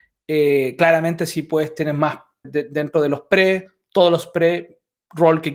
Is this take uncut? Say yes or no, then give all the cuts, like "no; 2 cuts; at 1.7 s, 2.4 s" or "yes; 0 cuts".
no; 1 cut; at 2.4 s